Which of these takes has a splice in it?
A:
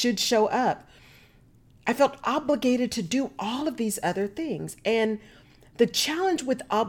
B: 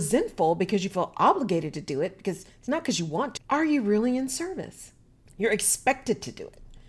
B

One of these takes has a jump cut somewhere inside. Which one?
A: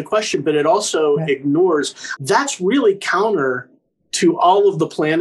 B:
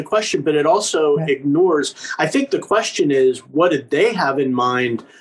A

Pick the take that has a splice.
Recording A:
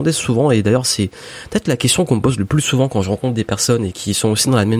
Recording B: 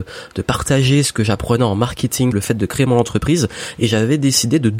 B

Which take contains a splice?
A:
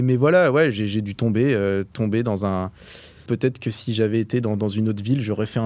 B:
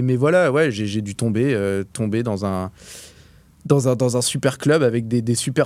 A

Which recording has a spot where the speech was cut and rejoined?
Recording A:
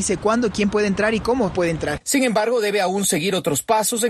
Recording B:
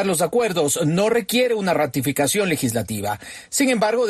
A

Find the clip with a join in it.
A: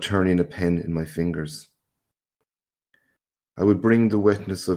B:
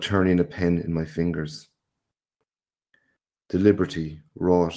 B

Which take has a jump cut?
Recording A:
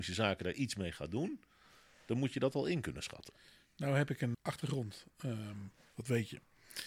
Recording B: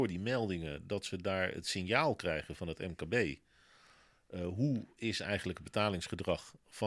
A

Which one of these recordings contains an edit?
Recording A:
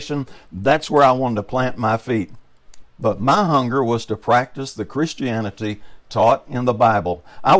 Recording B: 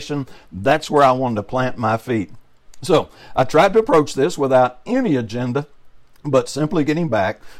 A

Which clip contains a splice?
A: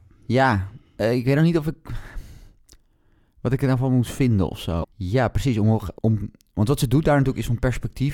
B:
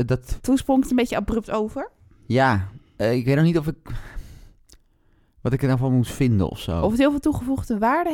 A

